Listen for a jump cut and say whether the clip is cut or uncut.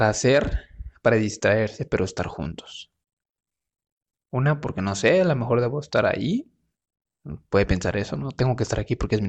uncut